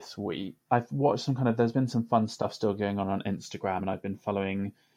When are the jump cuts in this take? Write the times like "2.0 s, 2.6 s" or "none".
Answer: none